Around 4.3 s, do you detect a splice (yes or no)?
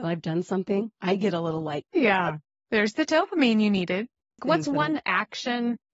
yes